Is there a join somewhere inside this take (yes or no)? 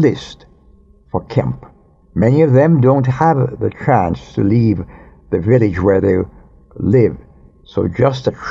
no